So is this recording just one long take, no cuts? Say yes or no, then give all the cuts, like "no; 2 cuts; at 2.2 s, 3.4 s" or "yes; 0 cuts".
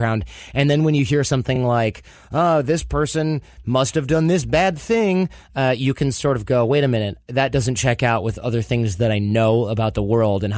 yes; 0 cuts